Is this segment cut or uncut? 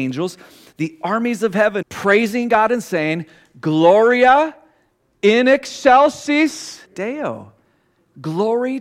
cut